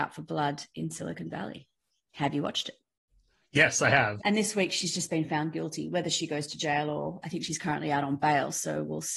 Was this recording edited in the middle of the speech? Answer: yes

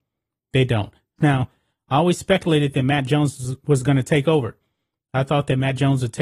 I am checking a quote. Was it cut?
yes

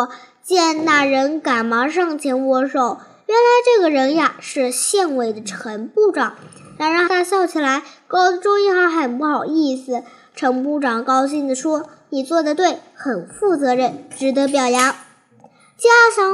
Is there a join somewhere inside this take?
yes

